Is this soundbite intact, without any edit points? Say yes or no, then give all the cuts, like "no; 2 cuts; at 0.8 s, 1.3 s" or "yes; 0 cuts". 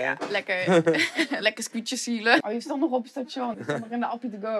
no; 2 cuts; at 2.4 s, 3.5 s